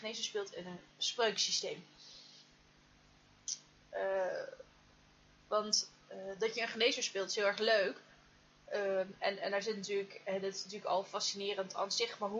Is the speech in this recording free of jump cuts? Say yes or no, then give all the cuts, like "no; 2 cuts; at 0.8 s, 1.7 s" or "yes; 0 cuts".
yes; 0 cuts